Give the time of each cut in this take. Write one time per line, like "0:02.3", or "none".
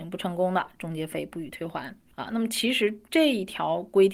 none